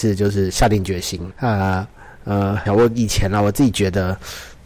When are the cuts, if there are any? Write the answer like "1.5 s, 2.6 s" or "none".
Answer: 1.3 s, 2.7 s